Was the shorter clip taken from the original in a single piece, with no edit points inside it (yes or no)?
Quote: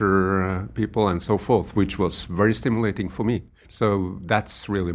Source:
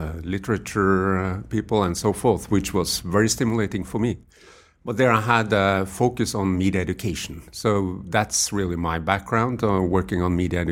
no